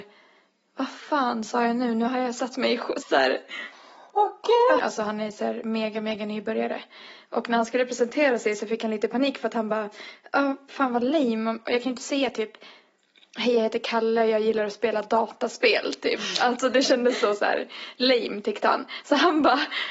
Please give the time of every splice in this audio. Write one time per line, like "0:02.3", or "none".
0:03.0
0:04.8
0:10.7